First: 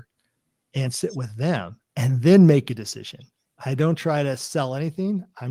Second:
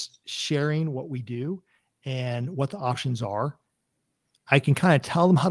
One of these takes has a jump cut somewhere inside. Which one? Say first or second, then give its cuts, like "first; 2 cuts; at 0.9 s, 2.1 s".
first; 1 cut; at 1.9 s